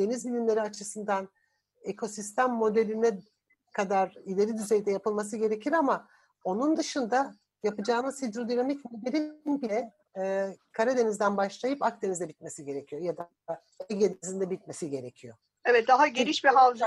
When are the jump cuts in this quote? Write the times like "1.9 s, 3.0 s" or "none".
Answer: none

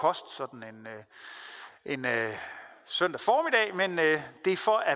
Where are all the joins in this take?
none

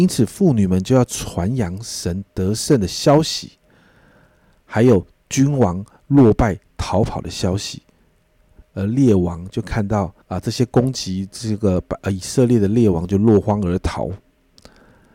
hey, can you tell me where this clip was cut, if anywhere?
8.6 s, 10.2 s

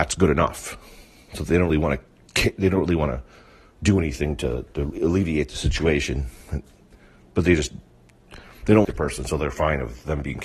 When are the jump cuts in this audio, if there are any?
1.7 s, 8.8 s

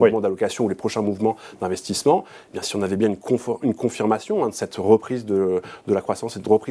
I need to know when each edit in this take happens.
none

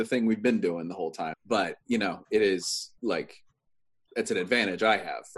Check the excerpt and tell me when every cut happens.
1.3 s, 3.0 s

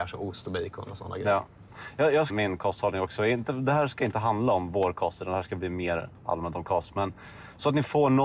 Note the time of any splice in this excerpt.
2.3 s

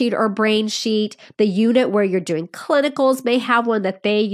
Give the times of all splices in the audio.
none

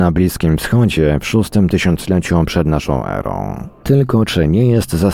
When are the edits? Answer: 3.8 s

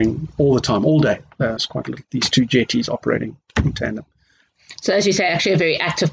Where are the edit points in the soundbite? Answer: 1.6 s

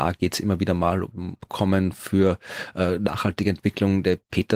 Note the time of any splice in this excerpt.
none

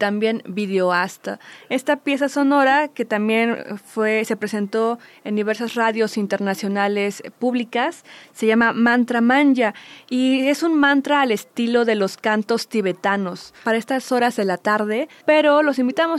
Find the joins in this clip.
15.2 s

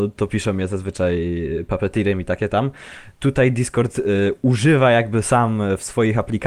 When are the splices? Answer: none

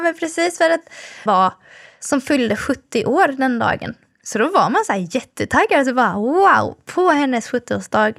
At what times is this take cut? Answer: 1.3 s

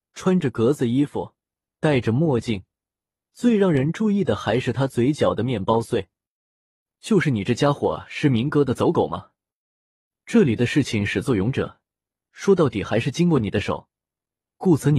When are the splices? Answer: none

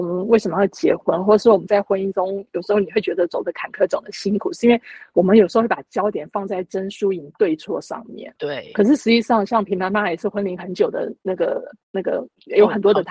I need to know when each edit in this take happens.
none

